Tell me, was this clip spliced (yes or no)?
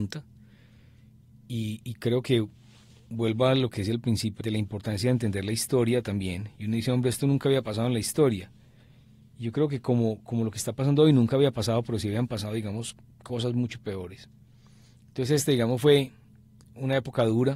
yes